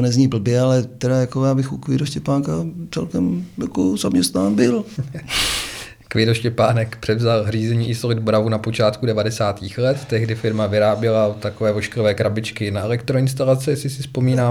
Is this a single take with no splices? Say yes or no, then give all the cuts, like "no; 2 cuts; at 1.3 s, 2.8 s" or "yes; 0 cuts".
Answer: yes; 0 cuts